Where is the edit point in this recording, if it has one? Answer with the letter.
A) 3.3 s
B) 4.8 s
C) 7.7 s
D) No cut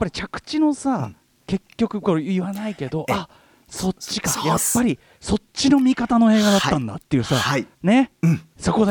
C